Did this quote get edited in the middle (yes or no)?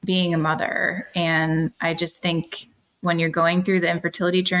no